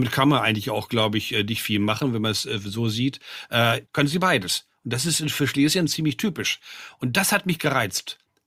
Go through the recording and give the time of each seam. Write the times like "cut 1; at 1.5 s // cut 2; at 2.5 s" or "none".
cut 1; at 3.9 s